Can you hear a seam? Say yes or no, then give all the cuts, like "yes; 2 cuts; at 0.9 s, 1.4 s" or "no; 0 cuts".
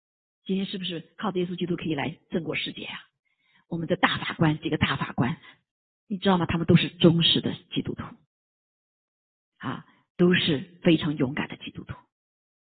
no; 0 cuts